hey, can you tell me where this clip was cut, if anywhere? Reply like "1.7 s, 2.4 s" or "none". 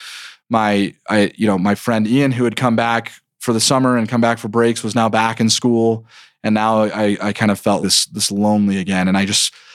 7.8 s